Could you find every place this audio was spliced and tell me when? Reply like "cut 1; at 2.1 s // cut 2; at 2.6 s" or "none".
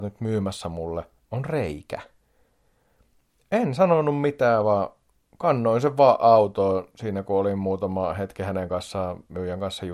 none